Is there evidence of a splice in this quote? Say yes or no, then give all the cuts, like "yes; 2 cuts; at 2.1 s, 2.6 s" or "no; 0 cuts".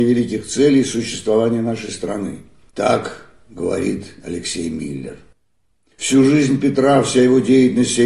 yes; 1 cut; at 2.7 s